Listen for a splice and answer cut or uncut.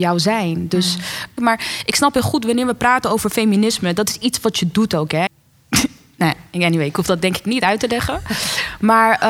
cut